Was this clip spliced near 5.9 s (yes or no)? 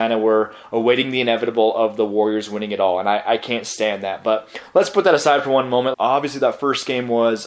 yes